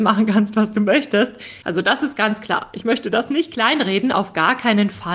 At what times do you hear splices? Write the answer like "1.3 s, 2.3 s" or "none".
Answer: 1.6 s